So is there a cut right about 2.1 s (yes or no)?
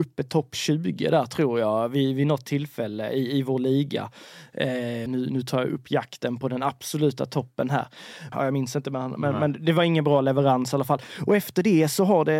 no